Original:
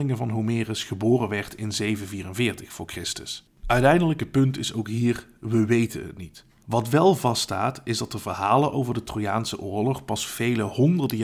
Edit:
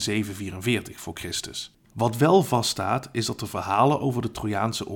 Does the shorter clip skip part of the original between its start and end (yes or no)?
yes